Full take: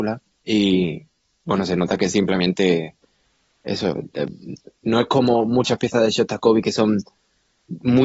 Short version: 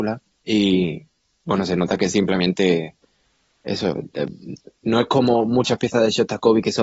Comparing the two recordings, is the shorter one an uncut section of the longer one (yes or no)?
yes